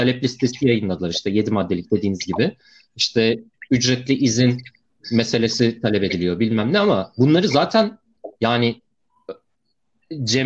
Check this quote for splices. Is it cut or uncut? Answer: uncut